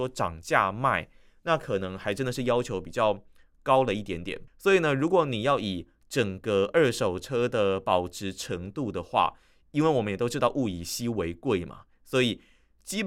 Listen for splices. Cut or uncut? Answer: cut